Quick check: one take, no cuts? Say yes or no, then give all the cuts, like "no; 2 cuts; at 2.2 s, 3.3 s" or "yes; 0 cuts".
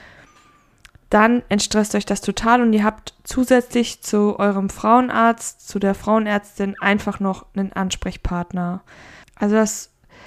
no; 1 cut; at 9.2 s